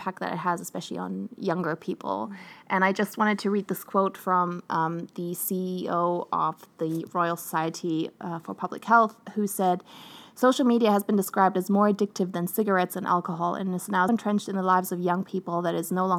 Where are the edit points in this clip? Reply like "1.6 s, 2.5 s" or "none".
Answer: 14.1 s